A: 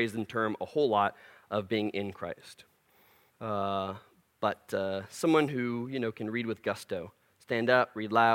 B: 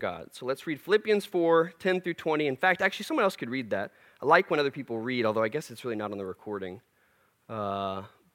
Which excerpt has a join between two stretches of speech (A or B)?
A